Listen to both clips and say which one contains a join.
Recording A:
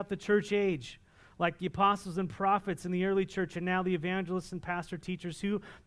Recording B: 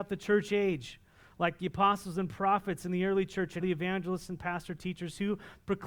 B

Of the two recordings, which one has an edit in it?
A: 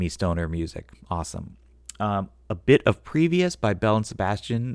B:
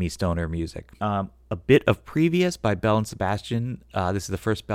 B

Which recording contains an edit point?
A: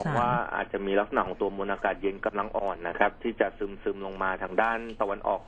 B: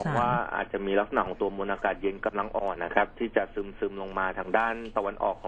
B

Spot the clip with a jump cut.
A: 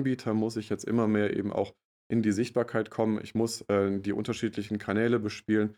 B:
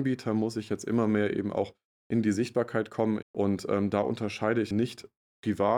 B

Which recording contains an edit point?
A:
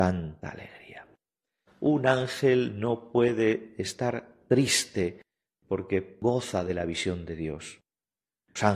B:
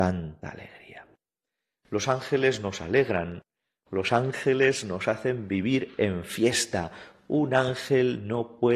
A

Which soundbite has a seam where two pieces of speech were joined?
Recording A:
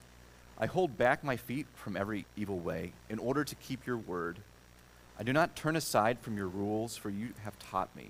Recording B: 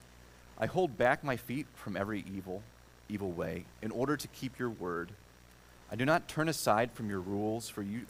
A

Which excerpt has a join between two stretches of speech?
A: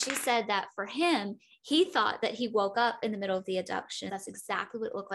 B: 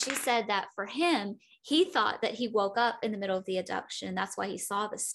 A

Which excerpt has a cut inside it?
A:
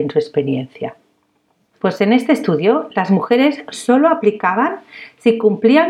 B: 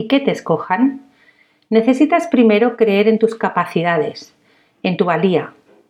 A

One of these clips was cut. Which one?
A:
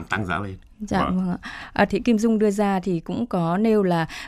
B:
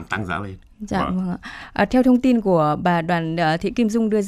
A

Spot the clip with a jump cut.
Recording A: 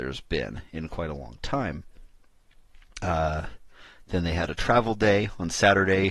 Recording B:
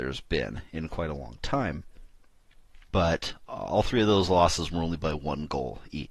B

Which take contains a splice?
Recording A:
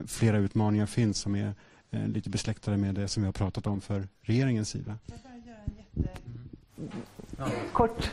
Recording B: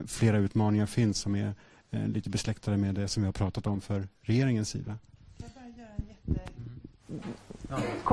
A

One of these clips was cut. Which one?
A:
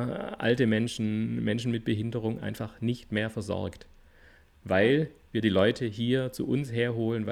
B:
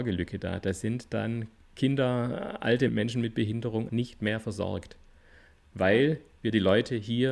B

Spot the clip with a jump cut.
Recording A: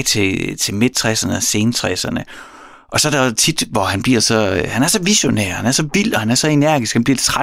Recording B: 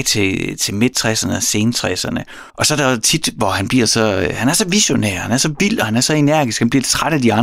B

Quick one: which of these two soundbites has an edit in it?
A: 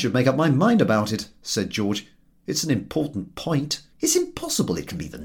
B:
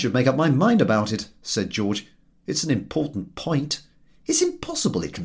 A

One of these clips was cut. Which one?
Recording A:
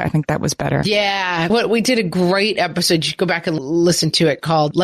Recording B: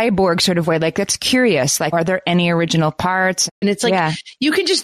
B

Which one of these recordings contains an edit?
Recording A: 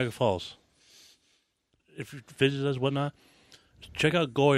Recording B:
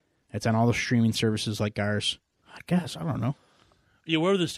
B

